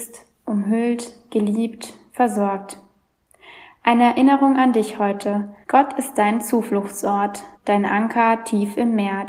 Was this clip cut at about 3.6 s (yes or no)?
no